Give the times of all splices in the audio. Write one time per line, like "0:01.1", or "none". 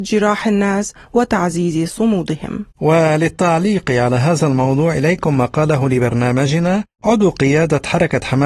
0:02.7
0:06.9

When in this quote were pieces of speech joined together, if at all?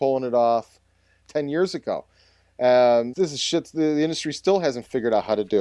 0:01.2
0:03.1

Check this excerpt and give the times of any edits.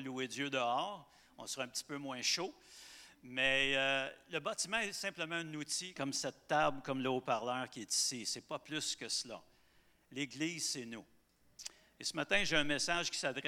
0:06.0

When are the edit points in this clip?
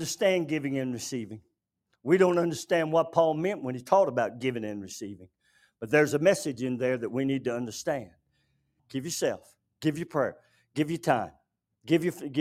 0:08.8

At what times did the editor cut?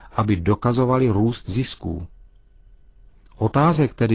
none

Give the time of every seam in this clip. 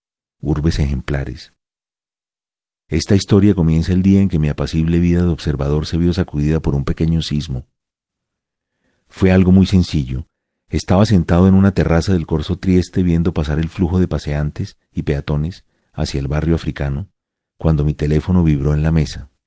none

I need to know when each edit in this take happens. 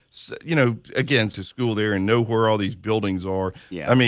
0:01.3

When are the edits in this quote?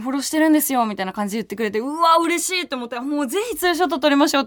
none

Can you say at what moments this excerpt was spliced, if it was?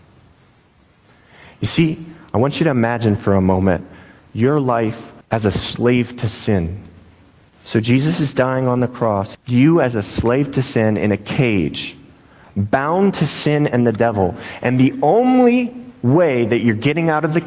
0:05.2
0:07.5
0:09.3

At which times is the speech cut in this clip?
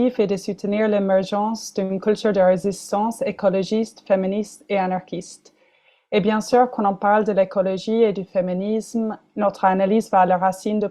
none

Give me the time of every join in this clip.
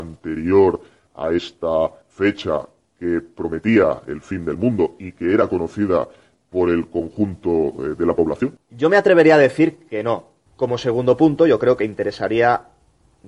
0:10.5

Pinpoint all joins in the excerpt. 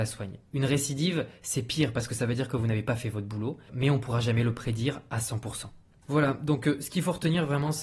0:03.7

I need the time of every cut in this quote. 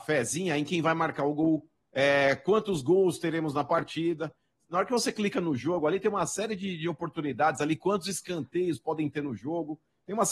0:01.8

